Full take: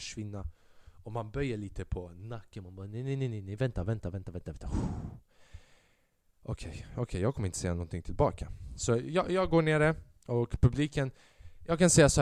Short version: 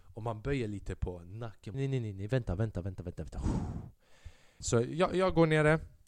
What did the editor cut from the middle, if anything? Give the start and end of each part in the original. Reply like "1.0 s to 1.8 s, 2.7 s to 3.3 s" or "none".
2.6 s to 3.0 s, 5.9 s to 8.8 s

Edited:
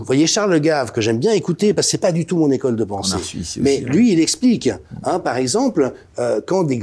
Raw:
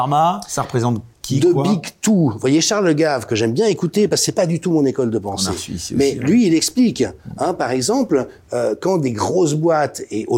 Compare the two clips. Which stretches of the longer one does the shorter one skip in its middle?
none

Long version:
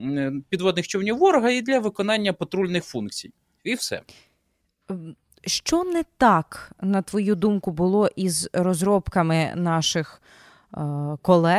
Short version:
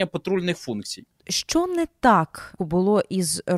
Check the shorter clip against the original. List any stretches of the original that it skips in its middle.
3.5 s to 5.4 s, 6.8 s to 7.6 s

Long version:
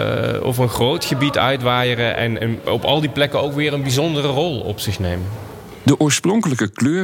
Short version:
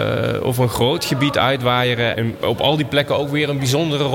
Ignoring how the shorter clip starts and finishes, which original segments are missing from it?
2.1 s to 2.4 s

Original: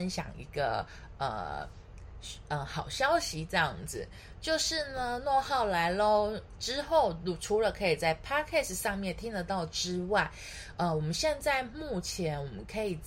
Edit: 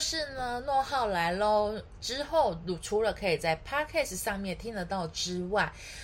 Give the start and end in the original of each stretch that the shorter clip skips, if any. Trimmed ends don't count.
none

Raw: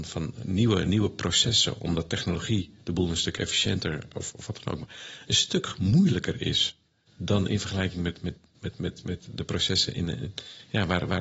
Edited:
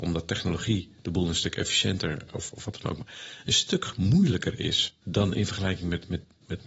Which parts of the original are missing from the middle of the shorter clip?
6.8 s to 7.2 s

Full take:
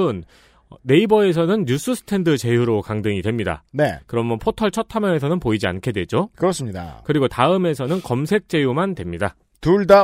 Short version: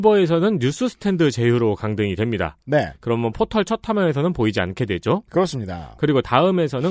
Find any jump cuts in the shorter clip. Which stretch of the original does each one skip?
none

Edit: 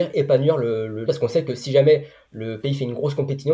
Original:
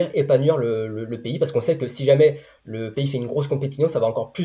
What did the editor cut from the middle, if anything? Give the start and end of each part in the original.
1.1 s to 1.4 s

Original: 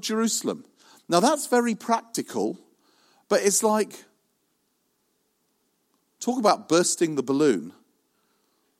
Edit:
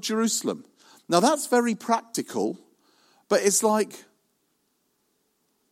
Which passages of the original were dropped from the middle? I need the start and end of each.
none

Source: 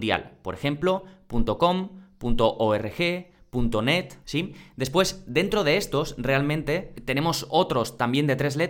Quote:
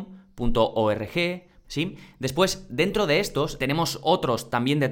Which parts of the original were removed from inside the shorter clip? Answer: 3.5 s to 4.2 s, 6.2 s to 7.1 s

